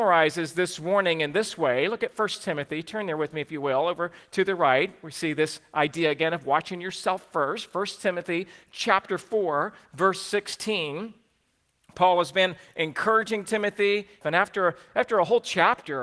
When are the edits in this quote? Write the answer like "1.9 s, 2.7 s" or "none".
14.2 s